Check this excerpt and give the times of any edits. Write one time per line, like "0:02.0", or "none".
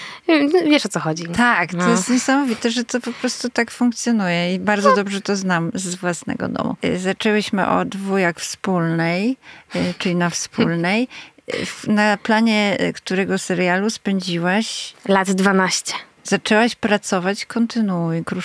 none